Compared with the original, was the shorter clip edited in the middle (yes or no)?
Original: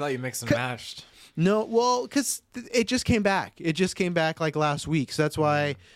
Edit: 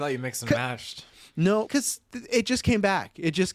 yes